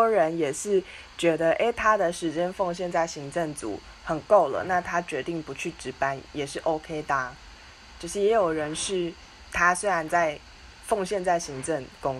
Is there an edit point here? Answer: no; 0 cuts

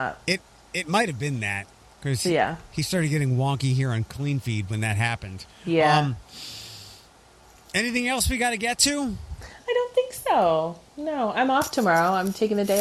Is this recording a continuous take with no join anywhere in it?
yes; 0 cuts

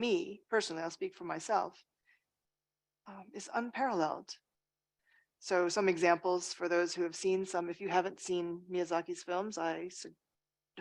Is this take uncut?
yes; 0 cuts

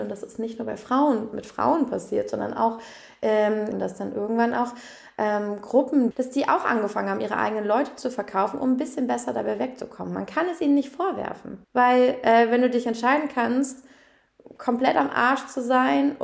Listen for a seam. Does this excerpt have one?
yes; 3 cuts; at 3.7 s, 6.1 s, 11.6 s

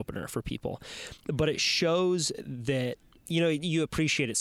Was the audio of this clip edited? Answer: no; 0 cuts

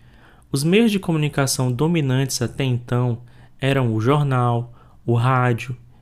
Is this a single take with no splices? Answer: yes; 0 cuts

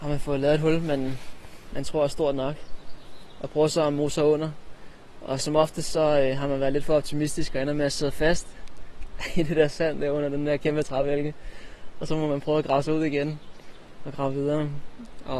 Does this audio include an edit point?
no; 0 cuts

